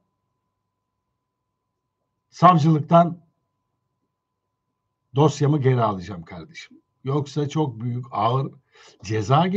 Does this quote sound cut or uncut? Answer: uncut